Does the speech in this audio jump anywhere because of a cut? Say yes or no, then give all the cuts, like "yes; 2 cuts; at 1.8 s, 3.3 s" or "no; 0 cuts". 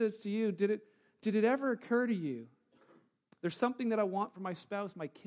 yes; 1 cut; at 3.3 s